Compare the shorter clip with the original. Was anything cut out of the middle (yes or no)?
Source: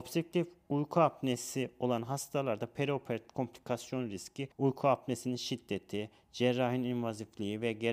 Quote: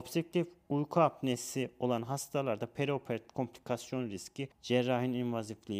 yes